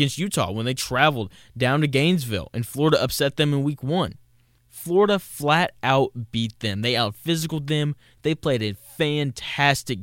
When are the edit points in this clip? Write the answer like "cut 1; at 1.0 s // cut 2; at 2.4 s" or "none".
cut 1; at 4.6 s